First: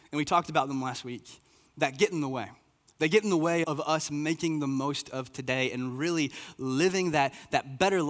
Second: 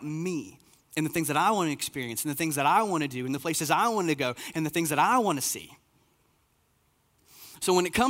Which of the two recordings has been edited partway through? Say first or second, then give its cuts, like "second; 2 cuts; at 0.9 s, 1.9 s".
first; 1 cut; at 3.6 s